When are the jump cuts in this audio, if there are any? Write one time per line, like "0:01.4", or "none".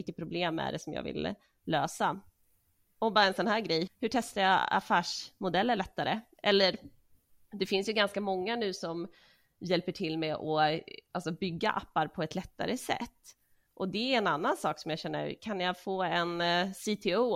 0:03.9